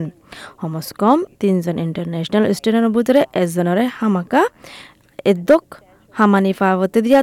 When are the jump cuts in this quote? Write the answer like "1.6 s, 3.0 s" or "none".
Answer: none